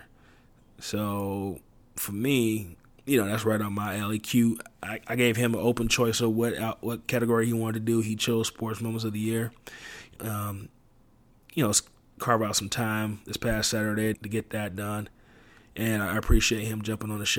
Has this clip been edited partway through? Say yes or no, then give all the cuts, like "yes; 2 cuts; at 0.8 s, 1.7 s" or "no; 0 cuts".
yes; 2 cuts; at 10.2 s, 14.1 s